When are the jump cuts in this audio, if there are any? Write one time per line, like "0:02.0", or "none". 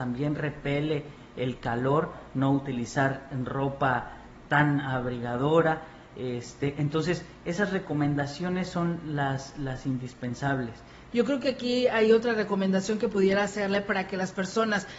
0:11.1